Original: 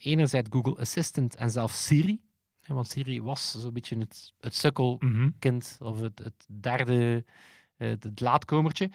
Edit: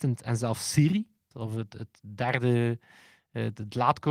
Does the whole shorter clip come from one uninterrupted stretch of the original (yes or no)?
no